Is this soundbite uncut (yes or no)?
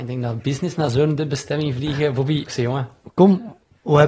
no